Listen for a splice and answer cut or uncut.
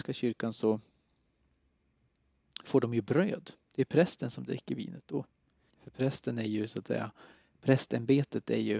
cut